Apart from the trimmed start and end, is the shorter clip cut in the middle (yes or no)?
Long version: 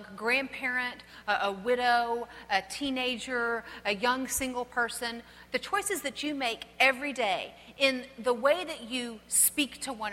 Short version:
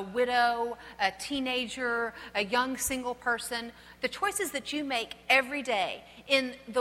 no